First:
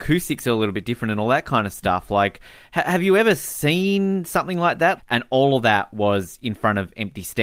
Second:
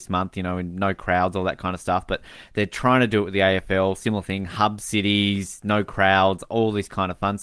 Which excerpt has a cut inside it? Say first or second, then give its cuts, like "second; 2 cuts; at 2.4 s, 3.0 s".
first; 1 cut; at 5.0 s